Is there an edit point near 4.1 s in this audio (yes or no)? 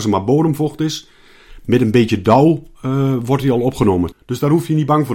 yes